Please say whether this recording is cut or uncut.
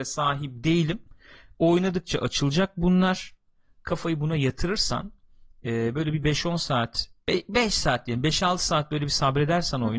uncut